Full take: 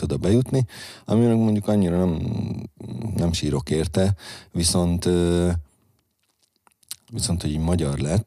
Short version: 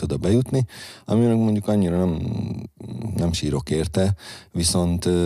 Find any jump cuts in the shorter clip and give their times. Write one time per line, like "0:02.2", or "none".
none